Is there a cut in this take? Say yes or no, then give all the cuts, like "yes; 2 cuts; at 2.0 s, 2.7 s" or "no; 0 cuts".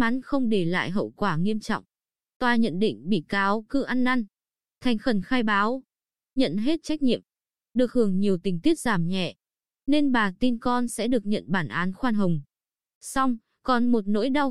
no; 0 cuts